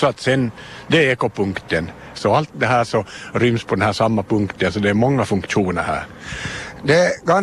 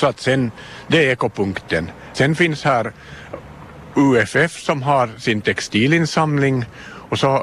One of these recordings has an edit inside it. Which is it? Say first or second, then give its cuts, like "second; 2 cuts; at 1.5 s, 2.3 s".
first; 1 cut; at 2.1 s